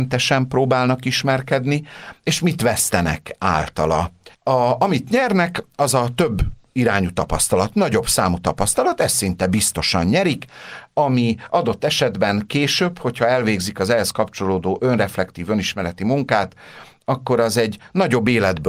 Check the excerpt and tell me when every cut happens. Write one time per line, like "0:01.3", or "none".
0:04.3